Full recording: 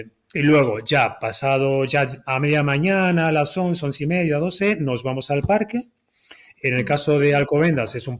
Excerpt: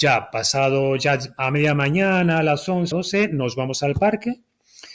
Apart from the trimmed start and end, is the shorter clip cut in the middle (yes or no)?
yes